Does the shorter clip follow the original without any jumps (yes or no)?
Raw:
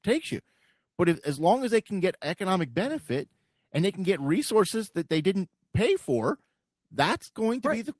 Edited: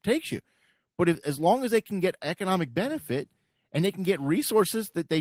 yes